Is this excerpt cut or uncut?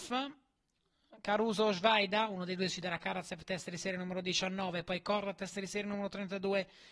uncut